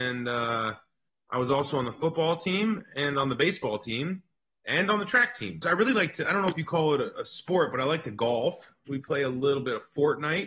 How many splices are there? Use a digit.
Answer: 2